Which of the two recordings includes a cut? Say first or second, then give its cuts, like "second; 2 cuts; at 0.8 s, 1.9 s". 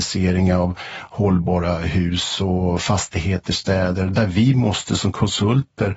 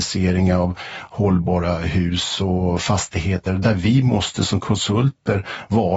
second; 1 cut; at 3.5 s